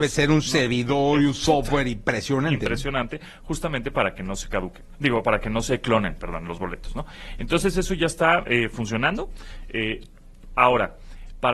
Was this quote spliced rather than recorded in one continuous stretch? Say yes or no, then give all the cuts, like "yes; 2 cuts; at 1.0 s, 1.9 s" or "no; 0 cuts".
no; 0 cuts